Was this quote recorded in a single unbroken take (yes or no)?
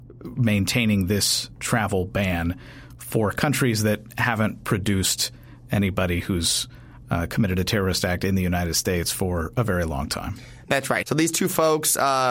no